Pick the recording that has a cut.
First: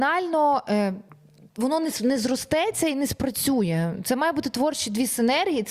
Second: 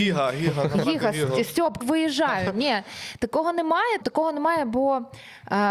second; 2 cuts; at 1.8 s, 4.0 s

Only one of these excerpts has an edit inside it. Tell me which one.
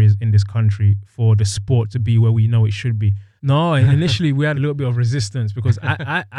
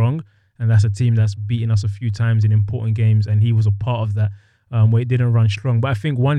first; 2 cuts; at 3.4 s, 4.5 s

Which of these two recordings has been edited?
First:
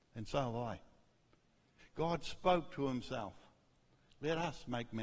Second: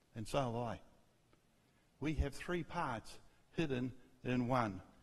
first; 1 cut; at 1.8 s

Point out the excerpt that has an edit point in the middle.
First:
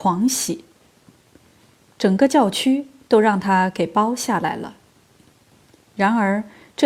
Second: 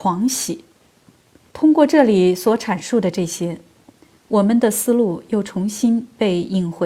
second; 1 cut; at 1.5 s

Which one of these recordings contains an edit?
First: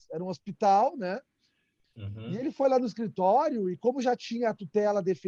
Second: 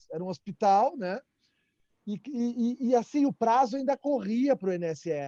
first; 1 cut; at 1.8 s

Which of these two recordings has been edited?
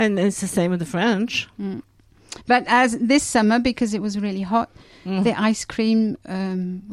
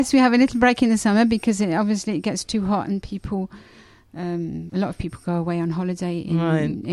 second; 1 cut; at 4.7 s

